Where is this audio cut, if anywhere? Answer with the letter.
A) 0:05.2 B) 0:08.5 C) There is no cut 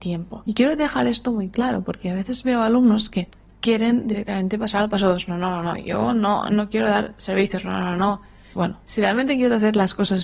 B